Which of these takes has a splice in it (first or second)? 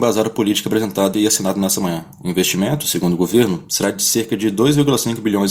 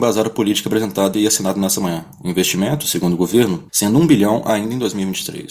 second